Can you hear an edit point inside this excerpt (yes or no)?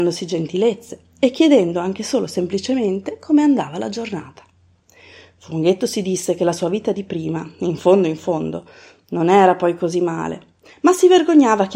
yes